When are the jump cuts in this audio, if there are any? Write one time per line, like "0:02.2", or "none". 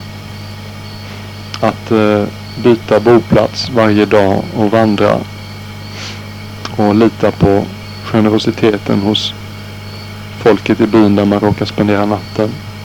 0:01.6